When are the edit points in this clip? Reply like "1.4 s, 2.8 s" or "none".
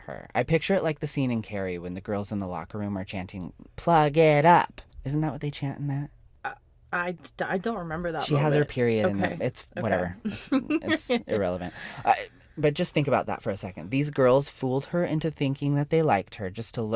4.9 s